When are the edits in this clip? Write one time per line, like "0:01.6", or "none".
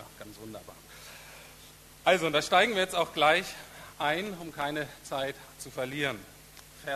none